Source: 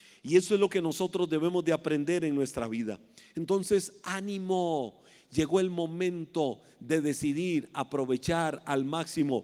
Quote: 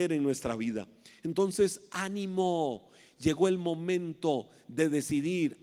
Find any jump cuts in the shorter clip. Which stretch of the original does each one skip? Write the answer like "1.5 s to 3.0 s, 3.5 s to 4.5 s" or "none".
none